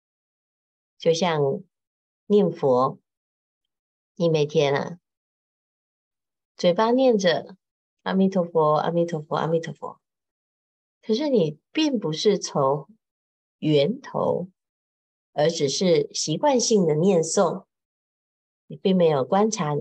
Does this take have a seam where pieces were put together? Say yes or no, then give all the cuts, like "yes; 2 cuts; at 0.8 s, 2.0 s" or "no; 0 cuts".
no; 0 cuts